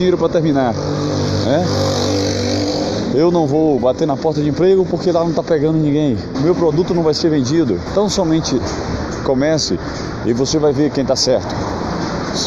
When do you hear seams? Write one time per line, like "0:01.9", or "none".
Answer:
0:06.3
0:07.9